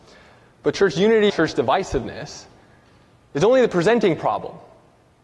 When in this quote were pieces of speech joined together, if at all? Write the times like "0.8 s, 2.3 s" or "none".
1.3 s